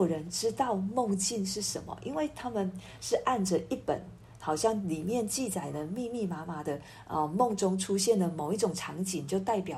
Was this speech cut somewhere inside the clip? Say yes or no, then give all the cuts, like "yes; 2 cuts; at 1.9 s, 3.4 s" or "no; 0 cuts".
no; 0 cuts